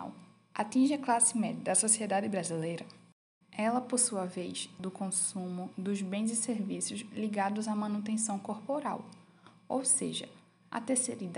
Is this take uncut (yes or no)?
no